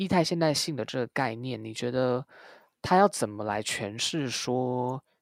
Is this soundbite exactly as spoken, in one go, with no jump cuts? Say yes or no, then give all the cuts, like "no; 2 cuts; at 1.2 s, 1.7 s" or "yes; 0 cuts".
yes; 0 cuts